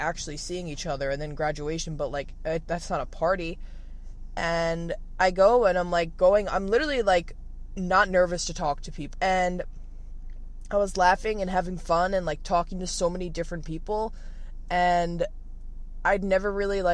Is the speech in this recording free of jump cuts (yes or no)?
no